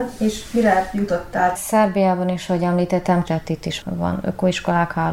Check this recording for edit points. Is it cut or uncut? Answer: cut